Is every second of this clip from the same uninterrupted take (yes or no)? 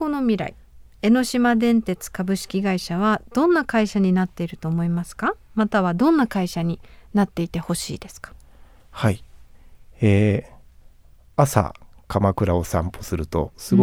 yes